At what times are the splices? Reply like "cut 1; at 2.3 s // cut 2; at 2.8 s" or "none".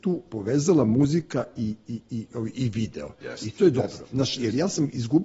none